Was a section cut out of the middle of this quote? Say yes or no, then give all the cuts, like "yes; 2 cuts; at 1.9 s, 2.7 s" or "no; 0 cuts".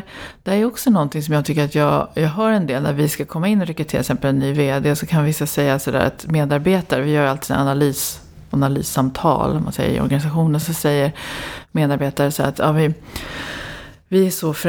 no; 0 cuts